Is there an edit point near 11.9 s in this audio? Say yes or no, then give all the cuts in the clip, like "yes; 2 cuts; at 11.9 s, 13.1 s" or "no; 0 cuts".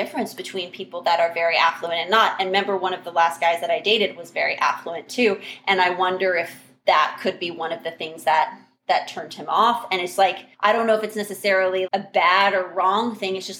yes; 2 cuts; at 10.5 s, 11.9 s